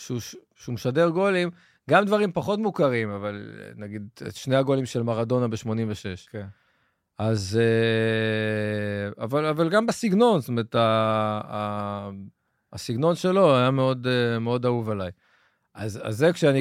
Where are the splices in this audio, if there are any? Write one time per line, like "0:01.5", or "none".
none